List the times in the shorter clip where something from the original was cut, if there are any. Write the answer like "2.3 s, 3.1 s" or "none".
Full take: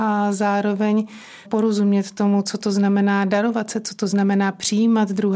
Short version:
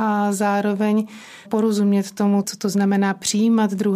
2.4 s